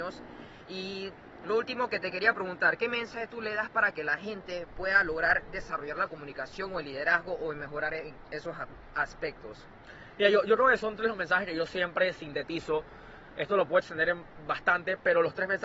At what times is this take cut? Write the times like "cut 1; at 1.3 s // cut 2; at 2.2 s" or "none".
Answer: cut 1; at 10.8 s